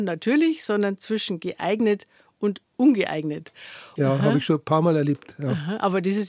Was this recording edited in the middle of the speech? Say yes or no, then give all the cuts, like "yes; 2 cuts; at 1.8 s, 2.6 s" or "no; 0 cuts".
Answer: yes; 1 cut; at 4.0 s